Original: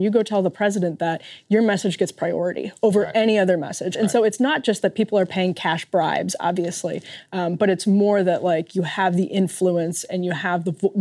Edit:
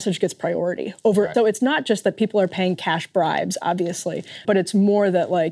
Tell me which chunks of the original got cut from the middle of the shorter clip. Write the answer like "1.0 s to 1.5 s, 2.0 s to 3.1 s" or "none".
3.1 s to 4.1 s, 7.2 s to 7.6 s